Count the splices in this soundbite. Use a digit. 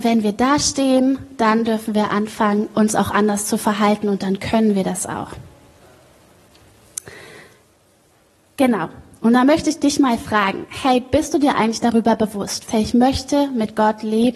1